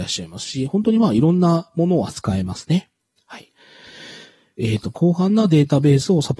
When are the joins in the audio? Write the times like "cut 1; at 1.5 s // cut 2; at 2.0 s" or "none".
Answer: cut 1; at 4.9 s